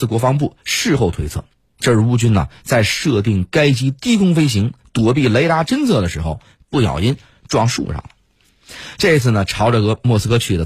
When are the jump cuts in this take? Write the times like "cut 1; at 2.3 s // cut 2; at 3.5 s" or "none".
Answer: none